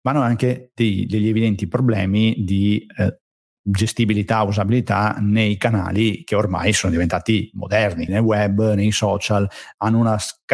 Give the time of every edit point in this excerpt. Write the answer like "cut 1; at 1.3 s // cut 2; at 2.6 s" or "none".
cut 1; at 8.1 s